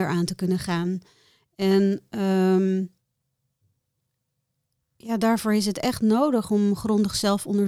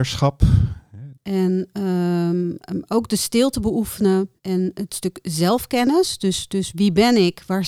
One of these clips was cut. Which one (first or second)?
second